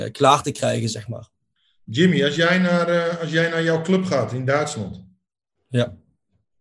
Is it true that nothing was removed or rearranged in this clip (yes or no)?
yes